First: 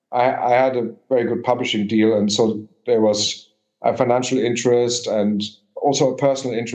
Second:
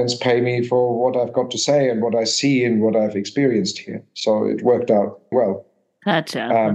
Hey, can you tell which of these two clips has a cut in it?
second; 1 cut; at 5.3 s

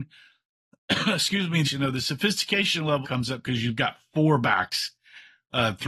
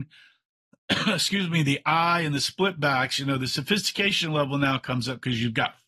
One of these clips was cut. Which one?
first; 2 cuts; at 1.6 s, 3.0 s

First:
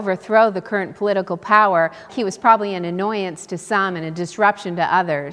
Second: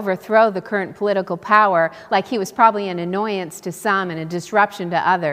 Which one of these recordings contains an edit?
first; 1 cut; at 2.1 s

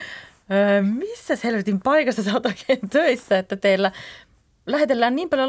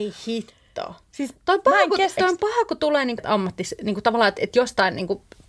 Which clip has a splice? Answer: second; 2 cuts; at 2.2 s, 3.2 s

